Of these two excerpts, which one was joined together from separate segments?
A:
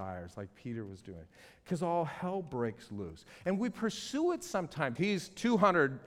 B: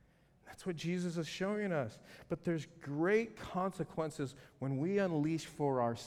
A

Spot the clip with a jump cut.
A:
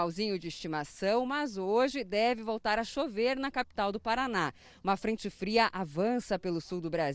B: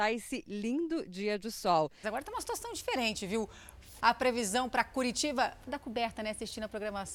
B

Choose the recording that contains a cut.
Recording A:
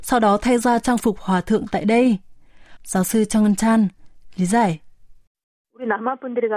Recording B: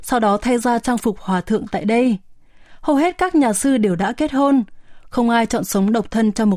A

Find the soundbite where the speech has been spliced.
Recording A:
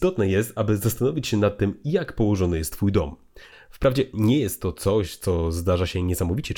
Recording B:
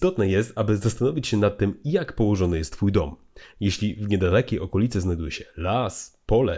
A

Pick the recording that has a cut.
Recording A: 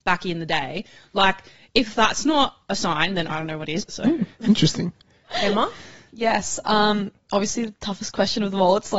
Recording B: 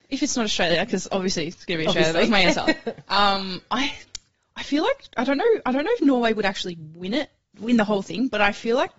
A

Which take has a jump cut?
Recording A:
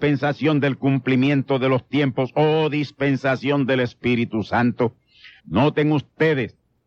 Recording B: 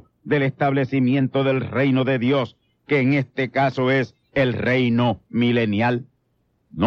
A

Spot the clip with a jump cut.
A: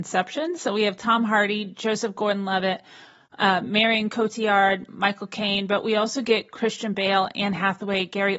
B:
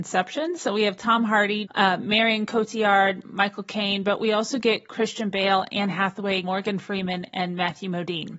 B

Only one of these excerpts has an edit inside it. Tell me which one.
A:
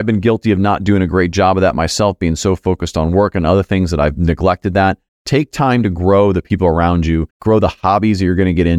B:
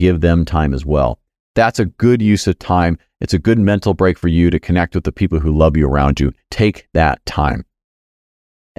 A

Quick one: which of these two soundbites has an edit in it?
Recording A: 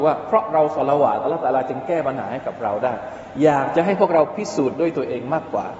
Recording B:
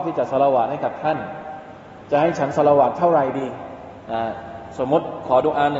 B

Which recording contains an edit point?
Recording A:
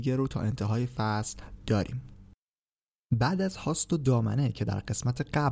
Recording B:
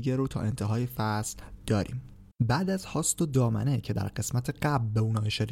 B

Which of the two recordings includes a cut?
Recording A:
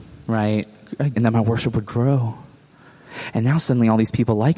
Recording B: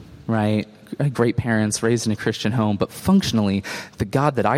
A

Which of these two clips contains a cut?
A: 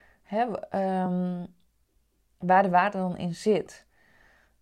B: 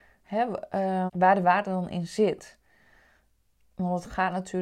B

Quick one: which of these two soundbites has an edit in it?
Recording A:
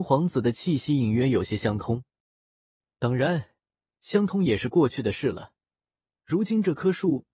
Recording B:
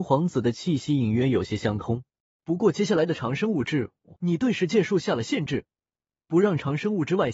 B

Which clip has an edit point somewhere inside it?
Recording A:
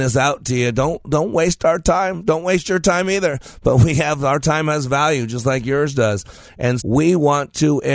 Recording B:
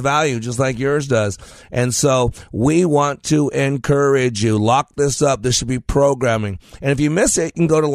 A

